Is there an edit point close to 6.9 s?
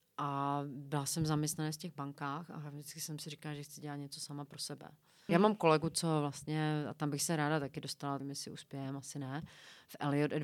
no; 2 cuts; at 5.3 s, 8.2 s

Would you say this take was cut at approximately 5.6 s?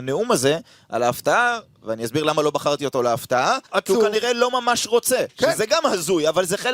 no; 1 cut; at 3.7 s

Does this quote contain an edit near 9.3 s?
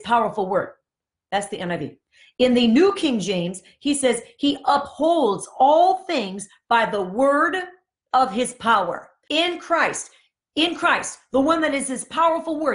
yes; 1 cut; at 9.3 s

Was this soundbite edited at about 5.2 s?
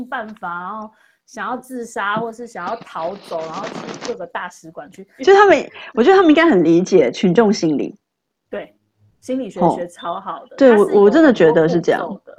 yes; 1 cut; at 5.2 s

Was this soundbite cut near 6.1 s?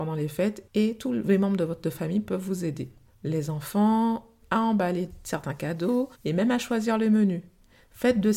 yes; 2 cuts; at 4.4 s, 6.1 s

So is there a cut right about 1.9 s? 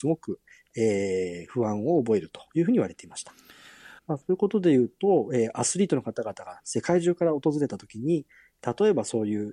no; 1 cut; at 4.0 s

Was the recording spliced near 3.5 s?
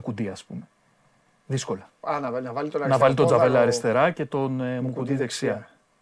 no; 1 cut; at 2.0 s

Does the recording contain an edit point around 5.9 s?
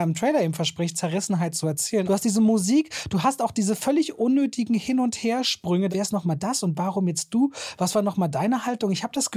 yes; 2 cuts; at 2.0 s, 5.9 s

